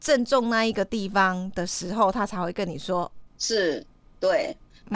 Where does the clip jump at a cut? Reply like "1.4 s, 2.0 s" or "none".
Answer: 3.3 s